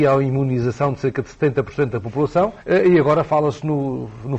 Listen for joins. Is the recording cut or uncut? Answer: cut